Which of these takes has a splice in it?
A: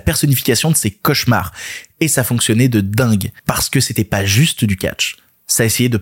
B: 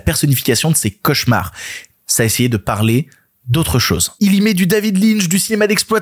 B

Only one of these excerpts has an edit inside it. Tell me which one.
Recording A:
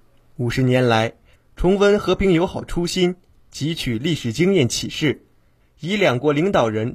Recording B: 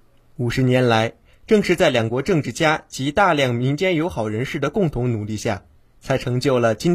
A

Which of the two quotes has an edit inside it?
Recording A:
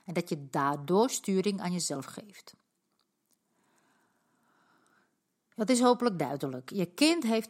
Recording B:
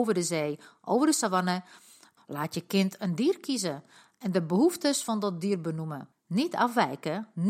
B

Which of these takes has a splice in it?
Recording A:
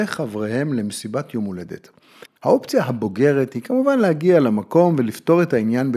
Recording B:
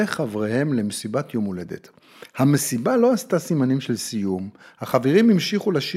A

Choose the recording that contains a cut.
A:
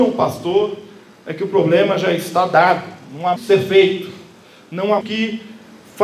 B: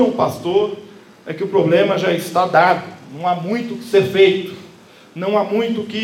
A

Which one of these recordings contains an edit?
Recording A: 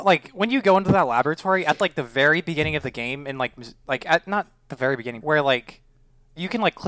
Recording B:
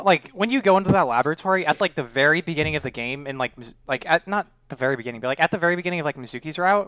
A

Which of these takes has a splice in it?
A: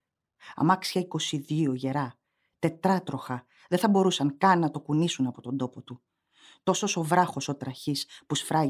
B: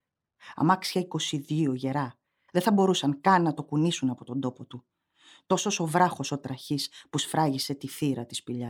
B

